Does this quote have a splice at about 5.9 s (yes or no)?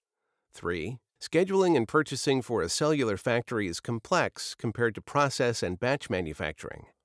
no